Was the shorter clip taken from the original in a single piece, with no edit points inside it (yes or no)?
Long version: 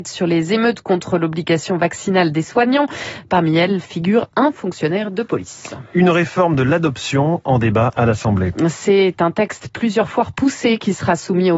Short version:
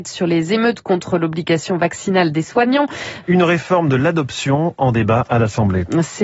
no